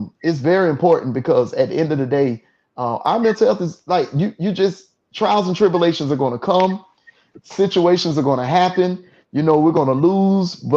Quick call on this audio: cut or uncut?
uncut